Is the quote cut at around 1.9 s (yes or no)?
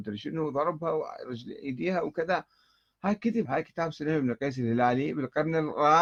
no